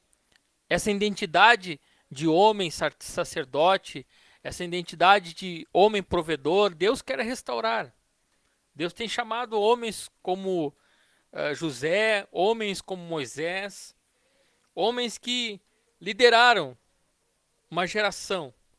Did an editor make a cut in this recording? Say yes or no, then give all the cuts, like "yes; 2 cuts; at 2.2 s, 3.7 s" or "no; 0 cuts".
no; 0 cuts